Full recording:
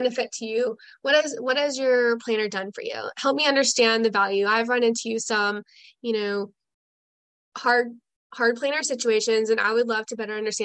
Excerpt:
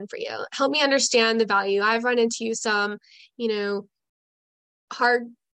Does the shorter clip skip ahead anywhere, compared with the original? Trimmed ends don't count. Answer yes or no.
no